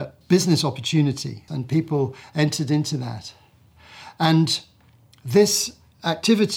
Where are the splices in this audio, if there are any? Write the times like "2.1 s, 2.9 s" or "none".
1.5 s